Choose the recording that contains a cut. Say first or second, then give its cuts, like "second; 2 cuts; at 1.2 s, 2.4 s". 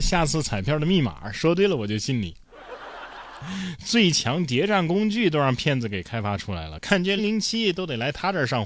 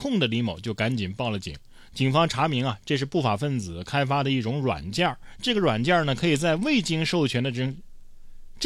first; 1 cut; at 7.2 s